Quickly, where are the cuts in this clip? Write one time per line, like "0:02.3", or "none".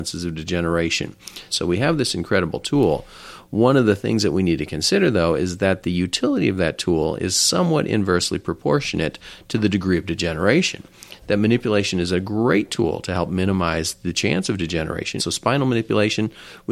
0:01.5
0:15.2